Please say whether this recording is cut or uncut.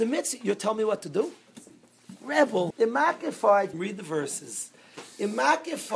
cut